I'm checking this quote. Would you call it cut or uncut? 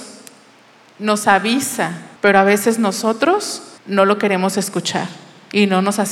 cut